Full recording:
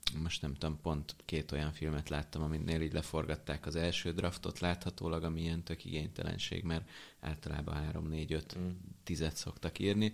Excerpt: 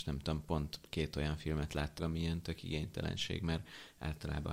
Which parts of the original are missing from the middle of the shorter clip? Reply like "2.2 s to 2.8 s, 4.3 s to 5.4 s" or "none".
2.3 s to 5.2 s

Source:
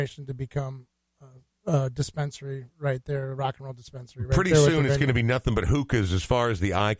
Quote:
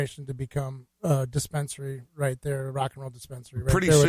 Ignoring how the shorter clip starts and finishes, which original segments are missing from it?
0.9 s to 1.6 s

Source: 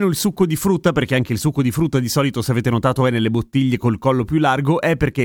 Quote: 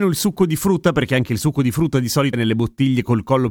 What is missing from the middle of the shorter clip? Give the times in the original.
2.3 s to 3.1 s

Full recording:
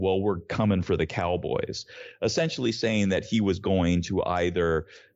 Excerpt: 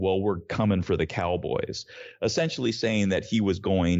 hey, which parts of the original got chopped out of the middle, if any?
none

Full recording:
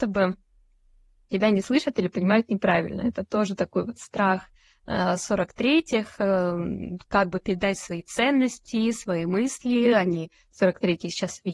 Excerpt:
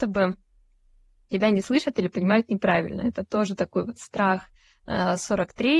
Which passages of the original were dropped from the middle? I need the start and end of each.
none

